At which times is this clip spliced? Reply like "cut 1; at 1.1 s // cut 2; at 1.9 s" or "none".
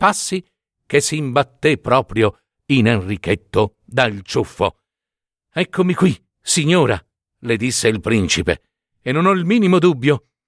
cut 1; at 6.3 s // cut 2; at 8.9 s